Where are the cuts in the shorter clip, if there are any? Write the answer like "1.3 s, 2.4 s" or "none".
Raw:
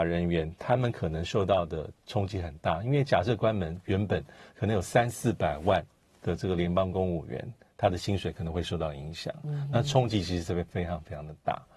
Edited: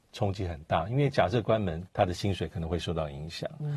1.9 s